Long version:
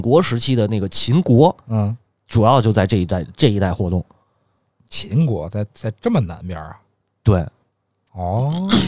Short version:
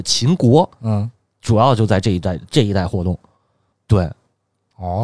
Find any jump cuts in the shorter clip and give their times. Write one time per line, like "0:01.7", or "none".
0:03.7